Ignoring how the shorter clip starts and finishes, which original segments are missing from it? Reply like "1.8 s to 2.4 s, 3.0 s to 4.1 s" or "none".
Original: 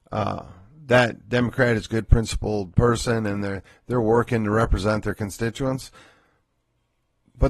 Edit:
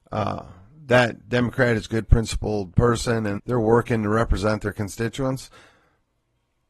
3.4 s to 3.8 s